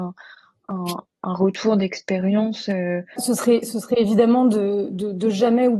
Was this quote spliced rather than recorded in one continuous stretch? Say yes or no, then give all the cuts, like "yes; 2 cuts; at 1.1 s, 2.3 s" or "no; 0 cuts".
yes; 1 cut; at 3.2 s